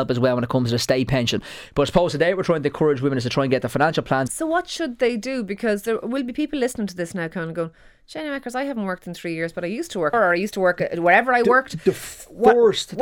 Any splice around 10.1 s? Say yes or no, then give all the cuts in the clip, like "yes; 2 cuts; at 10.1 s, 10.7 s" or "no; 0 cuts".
yes; 2 cuts; at 4.3 s, 10.1 s